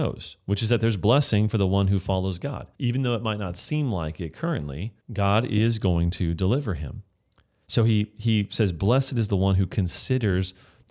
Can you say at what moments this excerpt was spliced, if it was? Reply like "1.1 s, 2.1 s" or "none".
2.7 s, 5.0 s